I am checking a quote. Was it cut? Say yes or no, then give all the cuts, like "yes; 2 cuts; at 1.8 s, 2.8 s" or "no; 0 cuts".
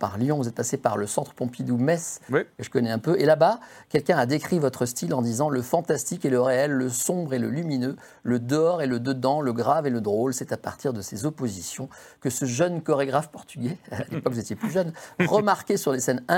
no; 0 cuts